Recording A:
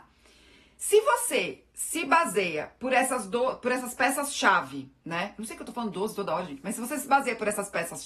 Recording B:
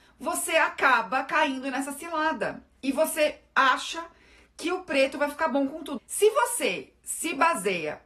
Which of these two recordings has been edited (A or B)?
B